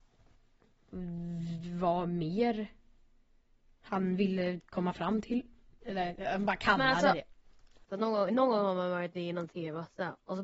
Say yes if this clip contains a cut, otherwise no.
yes